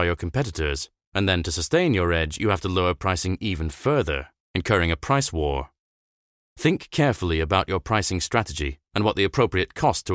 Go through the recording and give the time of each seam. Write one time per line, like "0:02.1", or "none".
none